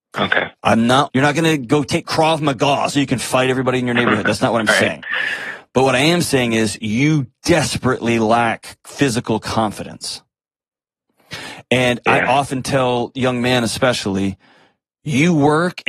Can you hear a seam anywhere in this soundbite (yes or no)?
yes